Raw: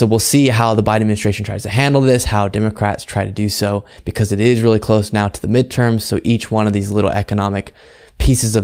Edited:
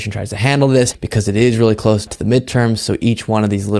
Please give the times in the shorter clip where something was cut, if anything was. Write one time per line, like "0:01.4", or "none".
0:00.9
0:02.1